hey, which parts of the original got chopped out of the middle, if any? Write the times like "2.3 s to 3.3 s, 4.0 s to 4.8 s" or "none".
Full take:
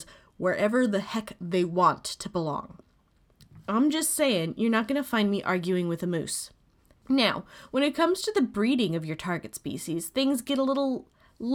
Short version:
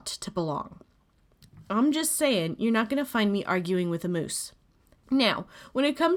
none

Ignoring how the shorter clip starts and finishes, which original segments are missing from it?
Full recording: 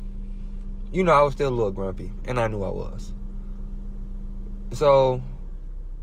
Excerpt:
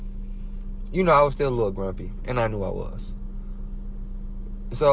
none

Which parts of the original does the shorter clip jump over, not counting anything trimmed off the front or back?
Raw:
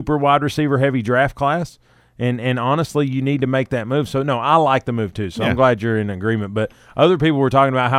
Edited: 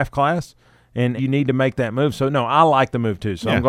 2.4 s to 3.1 s

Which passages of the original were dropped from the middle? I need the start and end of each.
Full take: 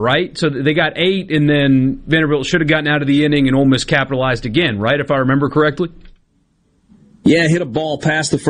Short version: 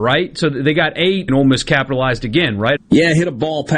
1.3 s to 3.5 s, 5.0 s to 7.1 s

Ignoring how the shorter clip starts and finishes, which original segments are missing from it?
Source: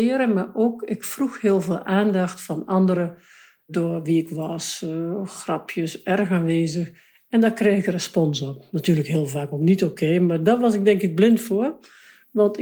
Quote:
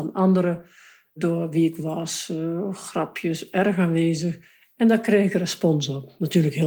none

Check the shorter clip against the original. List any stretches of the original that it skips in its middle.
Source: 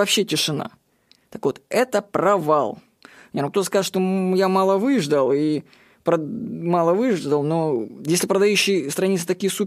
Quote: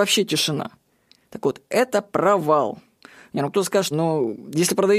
3.9 s to 7.4 s

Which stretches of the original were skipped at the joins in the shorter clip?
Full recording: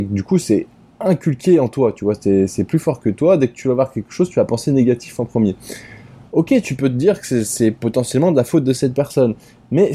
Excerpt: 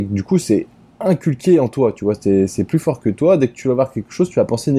none

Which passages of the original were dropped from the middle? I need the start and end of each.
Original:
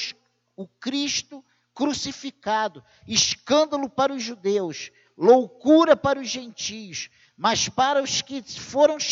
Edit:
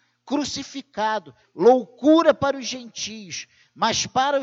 2.9 s to 5.0 s

